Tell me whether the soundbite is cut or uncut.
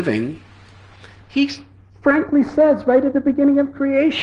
uncut